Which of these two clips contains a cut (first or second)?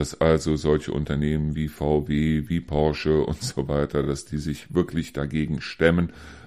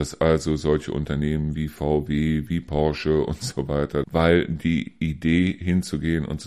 second